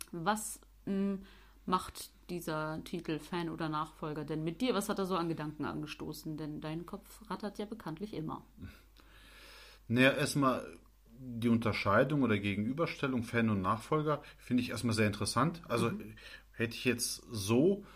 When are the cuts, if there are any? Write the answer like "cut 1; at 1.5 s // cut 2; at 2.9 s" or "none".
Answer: none